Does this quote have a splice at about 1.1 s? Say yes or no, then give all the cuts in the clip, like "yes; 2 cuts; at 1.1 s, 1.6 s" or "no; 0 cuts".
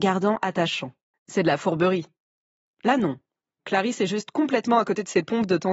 yes; 1 cut; at 1.1 s